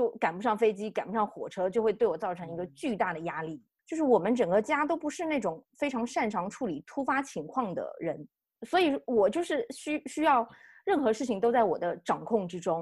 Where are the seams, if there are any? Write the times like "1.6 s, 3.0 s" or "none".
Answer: 3.8 s